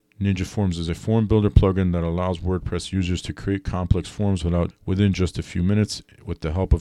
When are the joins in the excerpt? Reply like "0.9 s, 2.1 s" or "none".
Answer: 4.7 s